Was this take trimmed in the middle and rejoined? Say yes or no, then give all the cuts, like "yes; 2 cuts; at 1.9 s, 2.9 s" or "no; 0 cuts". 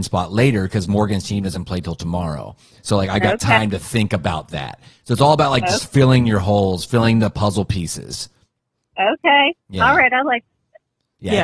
no; 0 cuts